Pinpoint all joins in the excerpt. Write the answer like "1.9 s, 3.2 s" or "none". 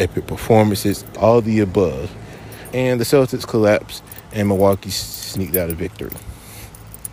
1.1 s, 2.7 s